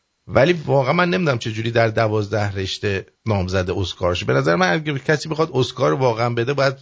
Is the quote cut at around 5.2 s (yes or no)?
no